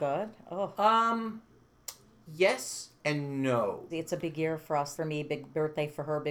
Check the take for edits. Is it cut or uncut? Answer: cut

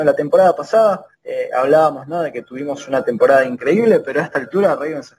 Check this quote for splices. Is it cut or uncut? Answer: cut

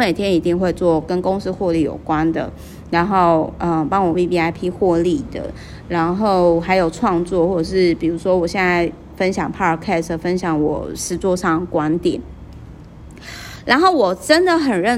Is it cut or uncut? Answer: uncut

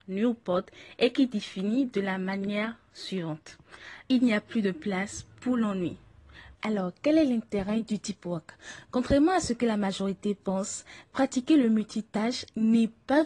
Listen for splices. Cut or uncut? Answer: cut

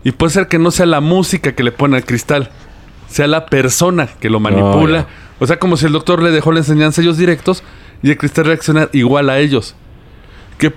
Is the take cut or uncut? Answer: uncut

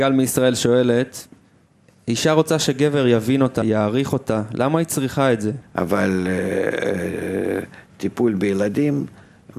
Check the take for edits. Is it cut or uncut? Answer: cut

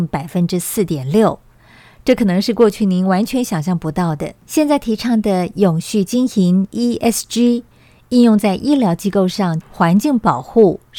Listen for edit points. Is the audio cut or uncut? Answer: cut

